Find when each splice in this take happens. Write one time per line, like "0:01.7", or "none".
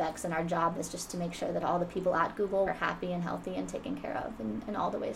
0:02.7